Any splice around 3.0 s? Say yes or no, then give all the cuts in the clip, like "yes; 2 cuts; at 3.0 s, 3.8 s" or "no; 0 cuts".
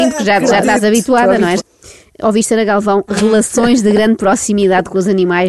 no; 1 cut; at 1.6 s